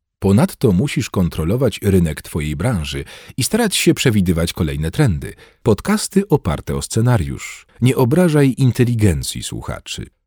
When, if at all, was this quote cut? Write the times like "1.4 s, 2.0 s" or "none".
5.6 s, 7.7 s